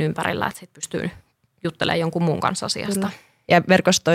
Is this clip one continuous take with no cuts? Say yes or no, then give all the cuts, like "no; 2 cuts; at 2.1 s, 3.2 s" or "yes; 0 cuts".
yes; 0 cuts